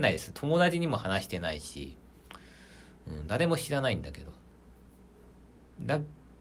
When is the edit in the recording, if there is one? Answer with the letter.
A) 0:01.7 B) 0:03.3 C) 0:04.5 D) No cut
D